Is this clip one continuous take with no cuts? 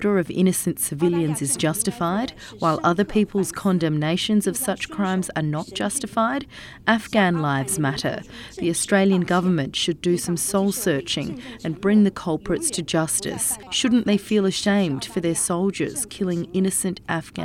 no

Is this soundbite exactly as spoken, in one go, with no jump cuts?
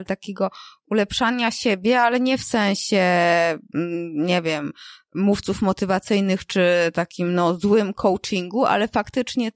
yes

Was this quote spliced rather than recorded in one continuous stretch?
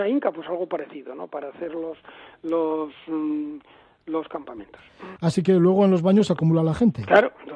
yes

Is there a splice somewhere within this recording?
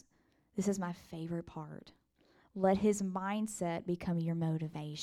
no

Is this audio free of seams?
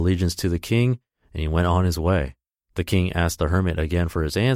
yes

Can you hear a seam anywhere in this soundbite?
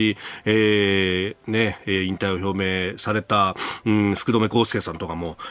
no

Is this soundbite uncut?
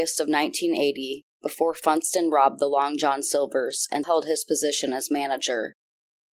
no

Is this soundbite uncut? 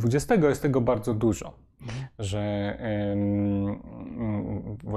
yes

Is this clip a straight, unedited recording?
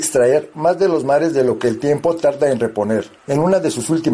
no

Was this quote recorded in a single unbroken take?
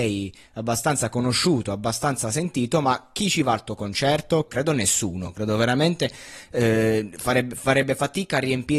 no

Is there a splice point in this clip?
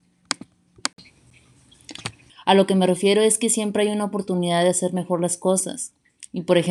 yes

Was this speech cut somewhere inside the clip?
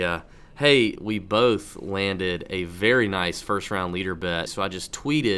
yes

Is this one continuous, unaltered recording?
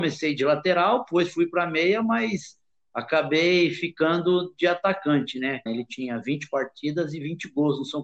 no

